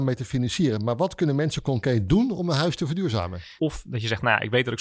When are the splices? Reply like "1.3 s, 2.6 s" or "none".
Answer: 3.6 s